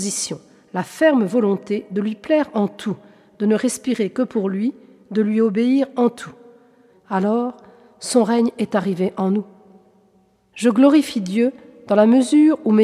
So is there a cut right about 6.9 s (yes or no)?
yes